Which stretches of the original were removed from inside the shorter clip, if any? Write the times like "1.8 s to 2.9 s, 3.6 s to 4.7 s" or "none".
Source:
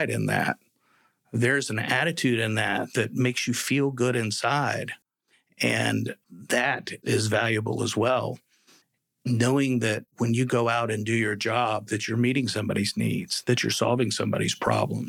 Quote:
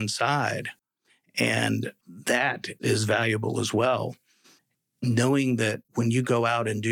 none